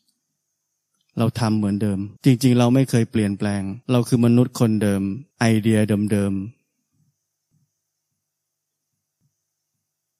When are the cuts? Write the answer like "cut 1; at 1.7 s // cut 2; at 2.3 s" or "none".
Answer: cut 1; at 2.2 s // cut 2; at 3.8 s // cut 3; at 5.3 s